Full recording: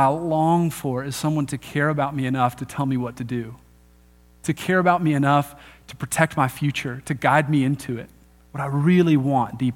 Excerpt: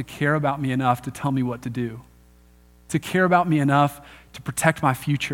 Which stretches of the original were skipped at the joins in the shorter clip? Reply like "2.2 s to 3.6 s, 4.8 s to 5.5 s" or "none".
none

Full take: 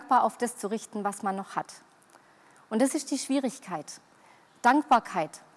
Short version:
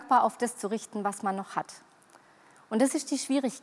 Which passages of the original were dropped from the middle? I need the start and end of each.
none

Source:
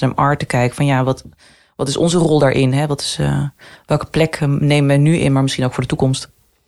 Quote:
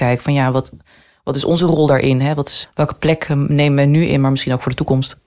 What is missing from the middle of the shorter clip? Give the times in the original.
3.2 s to 3.8 s

